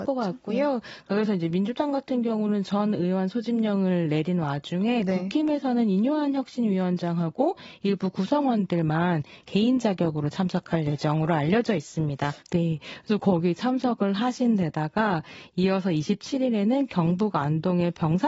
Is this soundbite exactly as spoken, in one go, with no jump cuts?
no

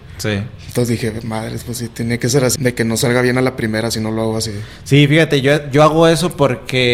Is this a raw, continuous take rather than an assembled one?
no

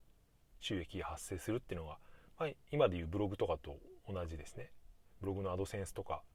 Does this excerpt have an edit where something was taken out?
no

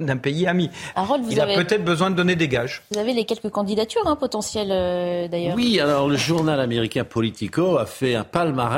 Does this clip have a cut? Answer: yes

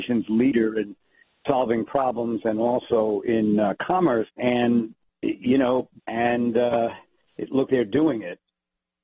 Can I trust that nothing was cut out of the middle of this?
no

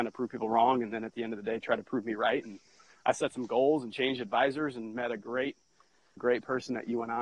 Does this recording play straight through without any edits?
no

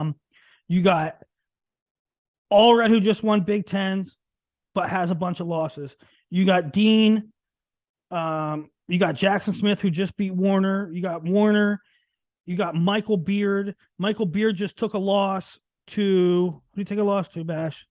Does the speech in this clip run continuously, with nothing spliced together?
yes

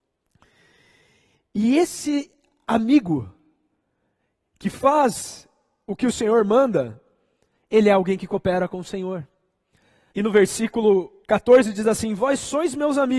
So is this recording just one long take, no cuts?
no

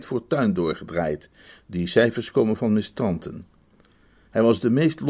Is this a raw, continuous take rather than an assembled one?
yes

